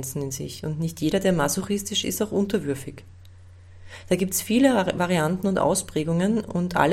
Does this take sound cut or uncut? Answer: cut